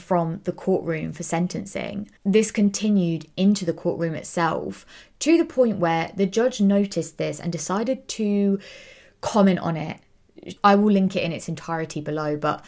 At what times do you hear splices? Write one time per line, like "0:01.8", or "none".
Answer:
0:02.2
0:10.6